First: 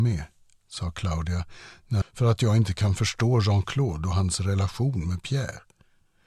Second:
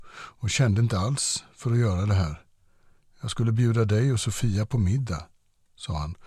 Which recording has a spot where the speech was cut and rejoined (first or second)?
first